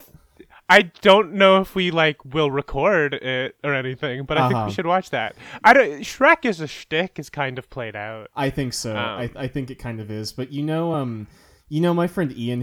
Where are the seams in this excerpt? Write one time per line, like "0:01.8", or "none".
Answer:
none